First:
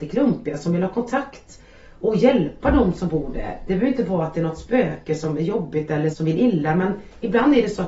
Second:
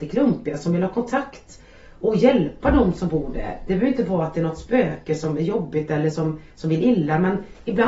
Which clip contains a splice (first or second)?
first